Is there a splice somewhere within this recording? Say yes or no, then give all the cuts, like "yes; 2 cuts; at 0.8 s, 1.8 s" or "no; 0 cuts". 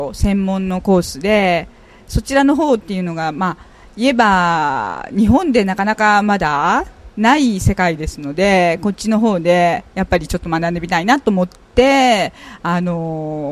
no; 0 cuts